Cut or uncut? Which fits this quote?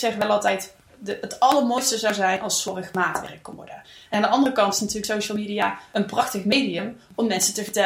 cut